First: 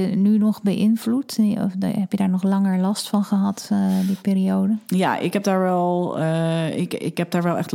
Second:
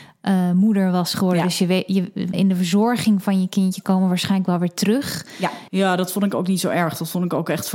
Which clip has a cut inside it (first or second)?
second